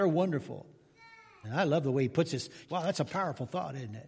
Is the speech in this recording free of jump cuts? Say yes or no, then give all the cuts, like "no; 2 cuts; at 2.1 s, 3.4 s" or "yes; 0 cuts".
no; 2 cuts; at 1.4 s, 2.6 s